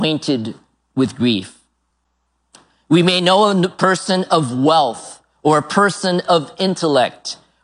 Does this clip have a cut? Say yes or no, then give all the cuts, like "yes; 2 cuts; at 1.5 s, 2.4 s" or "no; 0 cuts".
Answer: no; 0 cuts